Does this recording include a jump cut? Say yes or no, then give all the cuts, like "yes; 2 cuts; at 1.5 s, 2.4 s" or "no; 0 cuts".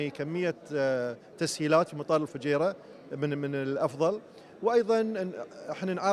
no; 0 cuts